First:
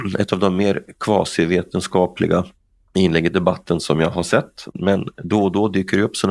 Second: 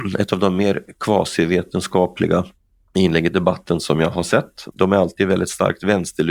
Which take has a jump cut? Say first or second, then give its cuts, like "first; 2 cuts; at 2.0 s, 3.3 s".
second; 1 cut; at 4.7 s